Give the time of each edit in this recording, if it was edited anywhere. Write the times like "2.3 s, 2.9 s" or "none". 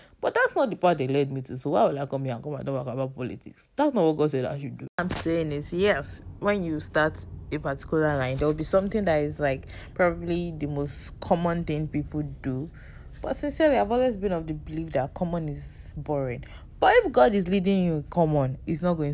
none